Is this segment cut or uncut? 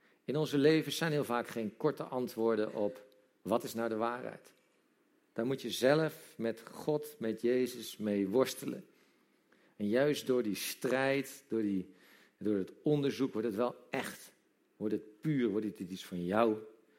uncut